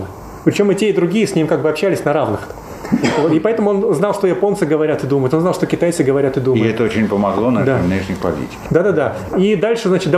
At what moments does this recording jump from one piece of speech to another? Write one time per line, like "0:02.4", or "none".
none